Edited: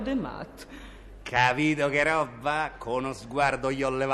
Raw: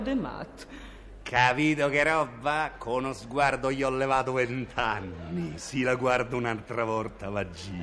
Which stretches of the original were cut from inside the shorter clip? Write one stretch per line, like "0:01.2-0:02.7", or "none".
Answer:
none